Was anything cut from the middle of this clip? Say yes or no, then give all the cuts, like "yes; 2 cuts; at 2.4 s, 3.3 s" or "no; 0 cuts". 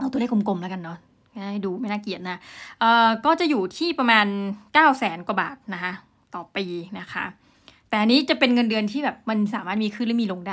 no; 0 cuts